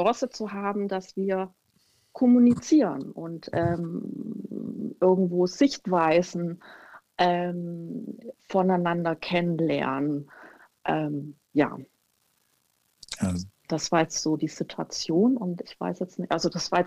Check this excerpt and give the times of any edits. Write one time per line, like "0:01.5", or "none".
0:08.4